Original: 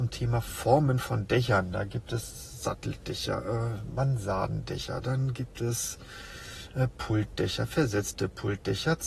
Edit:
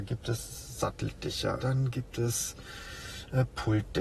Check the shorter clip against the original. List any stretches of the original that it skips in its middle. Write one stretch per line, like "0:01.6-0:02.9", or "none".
0:03.4-0:05.0